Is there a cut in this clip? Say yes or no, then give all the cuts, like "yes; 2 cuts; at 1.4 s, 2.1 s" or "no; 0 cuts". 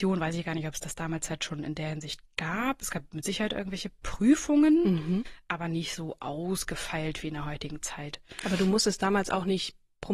no; 0 cuts